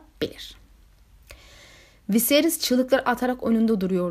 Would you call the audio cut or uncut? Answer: uncut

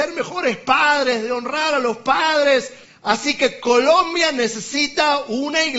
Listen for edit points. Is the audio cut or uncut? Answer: cut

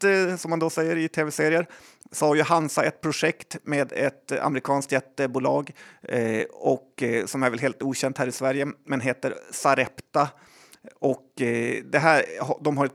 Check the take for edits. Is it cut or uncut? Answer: uncut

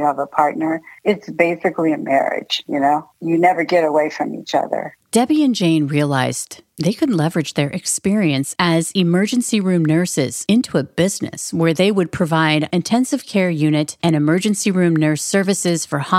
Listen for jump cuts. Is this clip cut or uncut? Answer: uncut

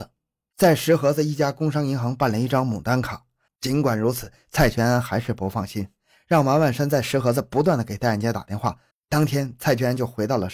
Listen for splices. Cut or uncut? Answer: cut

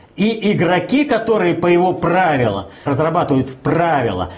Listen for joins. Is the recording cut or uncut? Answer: cut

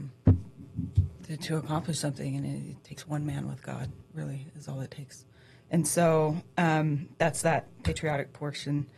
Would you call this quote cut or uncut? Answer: uncut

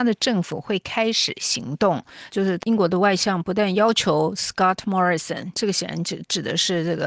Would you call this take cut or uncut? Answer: cut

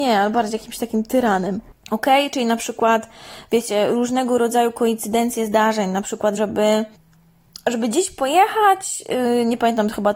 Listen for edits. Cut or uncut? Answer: cut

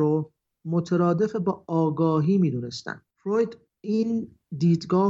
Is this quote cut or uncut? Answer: uncut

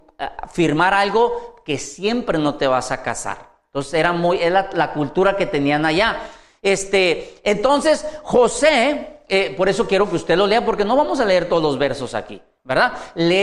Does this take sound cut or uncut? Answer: uncut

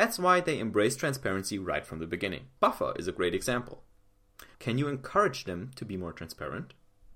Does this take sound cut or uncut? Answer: cut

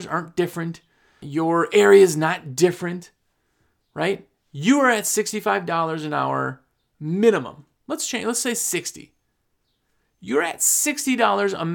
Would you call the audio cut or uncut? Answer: cut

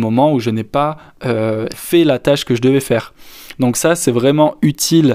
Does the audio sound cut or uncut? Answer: cut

